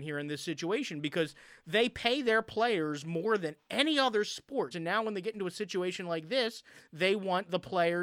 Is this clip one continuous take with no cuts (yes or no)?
no